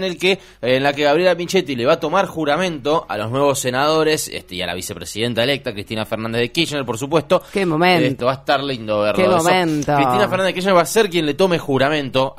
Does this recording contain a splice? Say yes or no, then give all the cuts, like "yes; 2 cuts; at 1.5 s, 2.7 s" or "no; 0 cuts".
yes; 1 cut; at 8.2 s